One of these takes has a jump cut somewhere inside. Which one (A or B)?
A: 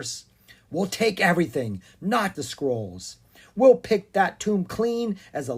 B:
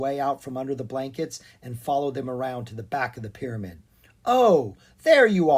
A